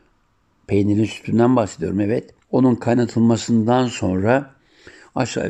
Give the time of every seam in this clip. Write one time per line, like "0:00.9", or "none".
0:02.4